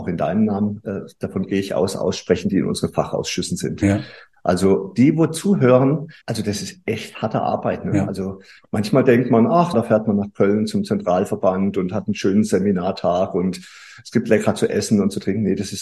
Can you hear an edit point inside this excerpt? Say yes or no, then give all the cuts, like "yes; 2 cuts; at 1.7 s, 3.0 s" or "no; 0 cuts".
yes; 2 cuts; at 6.2 s, 9.7 s